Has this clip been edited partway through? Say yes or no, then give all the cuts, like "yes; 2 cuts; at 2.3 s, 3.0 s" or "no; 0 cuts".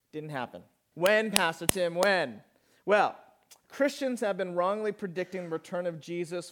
yes; 1 cut; at 0.9 s